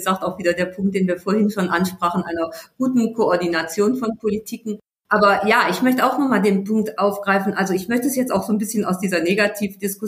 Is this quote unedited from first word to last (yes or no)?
yes